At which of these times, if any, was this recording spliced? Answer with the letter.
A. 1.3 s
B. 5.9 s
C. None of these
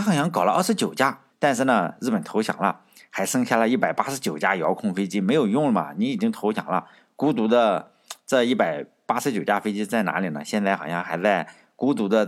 A